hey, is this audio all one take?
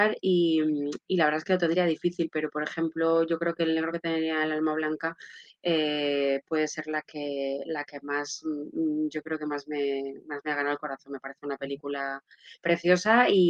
yes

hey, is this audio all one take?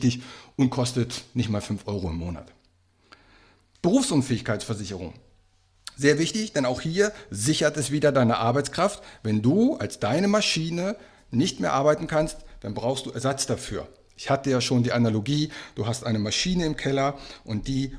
yes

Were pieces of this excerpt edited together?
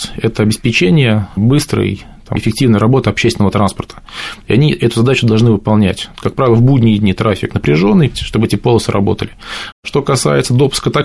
yes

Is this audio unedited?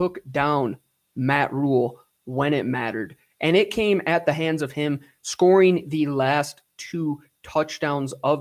yes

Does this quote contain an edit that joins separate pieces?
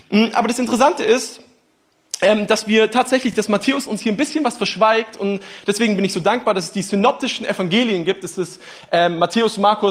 no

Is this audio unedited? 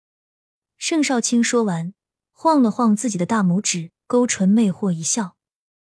yes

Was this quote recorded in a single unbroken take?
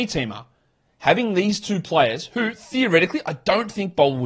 yes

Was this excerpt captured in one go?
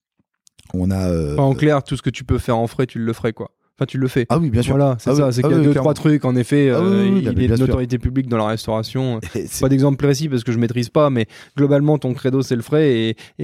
yes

